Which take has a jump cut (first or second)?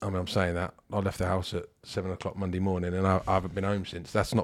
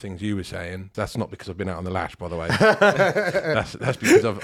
second